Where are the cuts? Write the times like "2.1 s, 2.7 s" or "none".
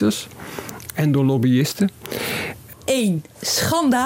2.7 s